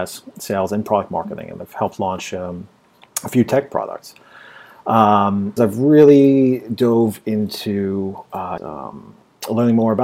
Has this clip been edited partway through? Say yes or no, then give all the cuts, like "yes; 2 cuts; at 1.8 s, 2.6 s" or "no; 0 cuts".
yes; 2 cuts; at 5.6 s, 8.6 s